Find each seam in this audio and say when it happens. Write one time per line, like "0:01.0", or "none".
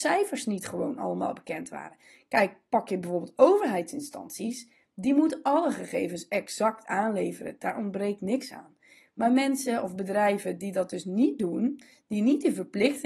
none